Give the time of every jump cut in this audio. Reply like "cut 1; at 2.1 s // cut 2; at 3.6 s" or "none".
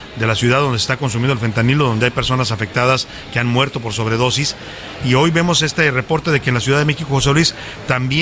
none